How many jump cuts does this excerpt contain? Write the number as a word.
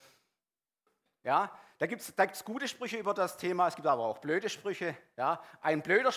zero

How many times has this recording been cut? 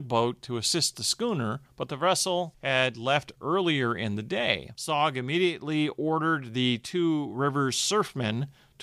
one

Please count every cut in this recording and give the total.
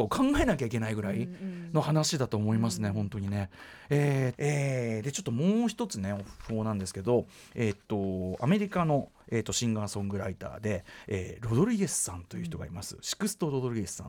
one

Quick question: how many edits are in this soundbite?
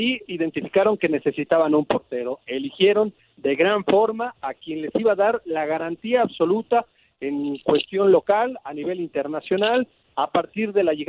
one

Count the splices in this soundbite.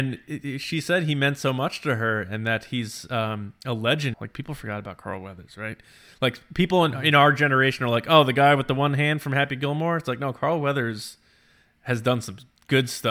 one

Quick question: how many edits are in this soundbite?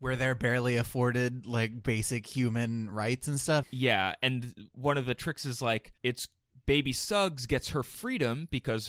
two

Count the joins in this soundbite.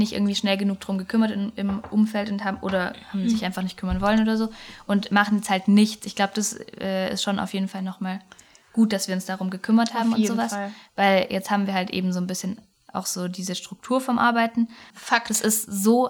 one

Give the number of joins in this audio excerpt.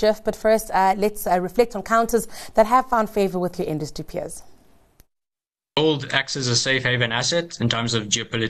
zero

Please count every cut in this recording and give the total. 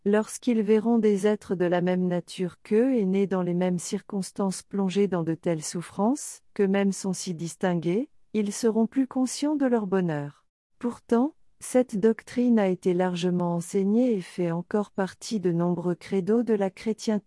two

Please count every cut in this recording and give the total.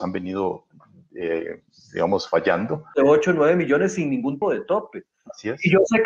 two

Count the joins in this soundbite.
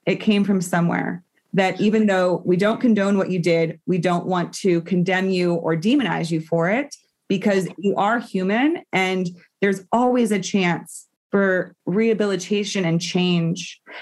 one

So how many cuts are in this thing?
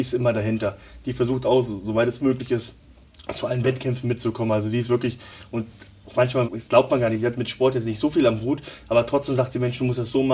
one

